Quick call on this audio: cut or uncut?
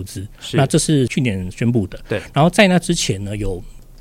uncut